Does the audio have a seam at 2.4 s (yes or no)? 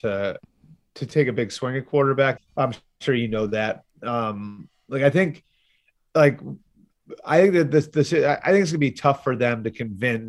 yes